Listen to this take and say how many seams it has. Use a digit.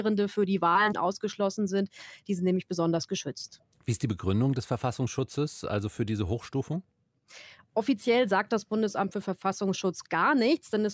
1